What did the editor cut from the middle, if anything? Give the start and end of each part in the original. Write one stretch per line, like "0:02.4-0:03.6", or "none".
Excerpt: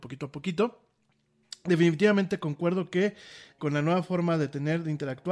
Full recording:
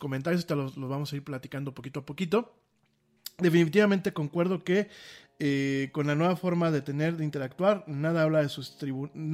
0:05.3-0:05.9